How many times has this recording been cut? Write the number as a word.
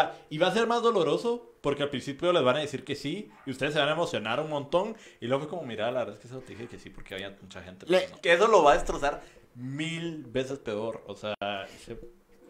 one